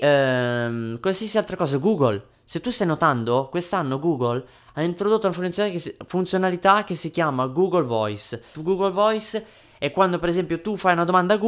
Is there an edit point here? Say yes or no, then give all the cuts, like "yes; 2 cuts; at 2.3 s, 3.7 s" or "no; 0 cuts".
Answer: yes; 1 cut; at 8.5 s